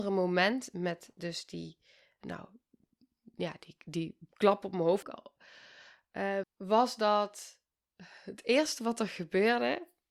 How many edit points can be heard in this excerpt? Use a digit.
2